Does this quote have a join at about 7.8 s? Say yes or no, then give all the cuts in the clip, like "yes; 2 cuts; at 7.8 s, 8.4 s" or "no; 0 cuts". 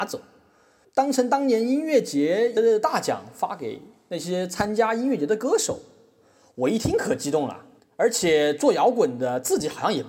yes; 1 cut; at 7.8 s